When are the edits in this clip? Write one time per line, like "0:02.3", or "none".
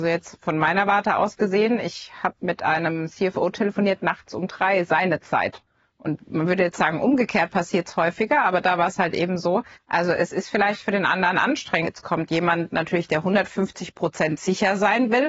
0:09.7
0:11.8